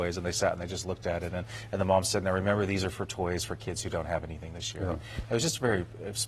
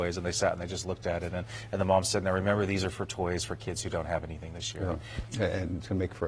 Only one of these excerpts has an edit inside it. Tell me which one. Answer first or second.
second